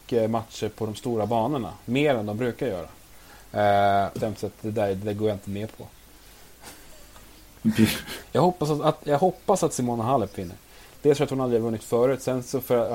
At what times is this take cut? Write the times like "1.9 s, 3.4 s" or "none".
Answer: 4.2 s, 8.2 s